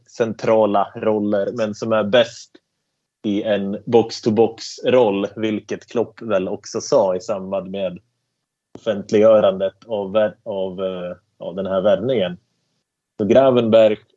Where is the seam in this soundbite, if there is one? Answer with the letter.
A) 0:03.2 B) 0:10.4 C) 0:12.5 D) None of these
D